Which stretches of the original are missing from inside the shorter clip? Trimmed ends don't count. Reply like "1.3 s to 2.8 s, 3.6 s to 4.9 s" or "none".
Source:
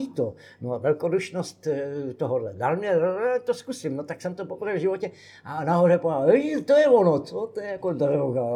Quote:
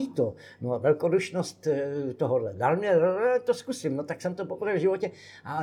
none